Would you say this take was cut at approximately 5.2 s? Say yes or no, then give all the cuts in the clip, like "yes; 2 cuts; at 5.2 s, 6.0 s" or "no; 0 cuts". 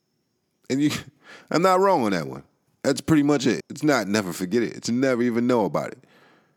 no; 1 cut; at 3.6 s